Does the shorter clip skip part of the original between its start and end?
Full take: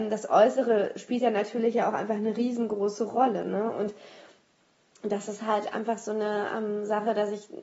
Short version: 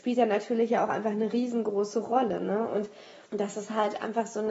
yes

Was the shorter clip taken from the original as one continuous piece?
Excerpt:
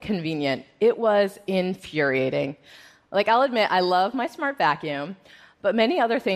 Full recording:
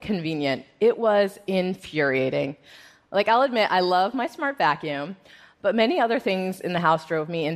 yes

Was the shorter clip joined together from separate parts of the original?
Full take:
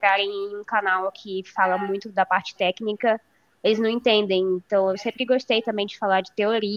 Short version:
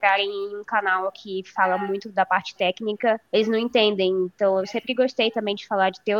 yes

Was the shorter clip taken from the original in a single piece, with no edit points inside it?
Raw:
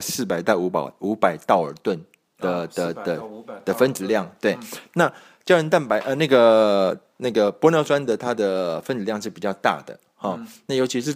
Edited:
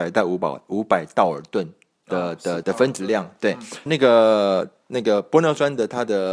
no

